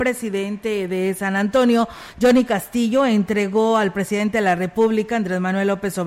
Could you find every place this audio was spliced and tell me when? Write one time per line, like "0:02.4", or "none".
none